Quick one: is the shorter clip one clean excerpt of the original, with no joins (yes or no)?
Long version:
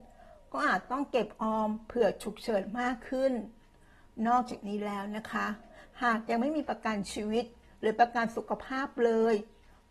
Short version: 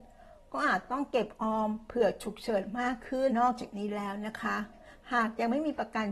no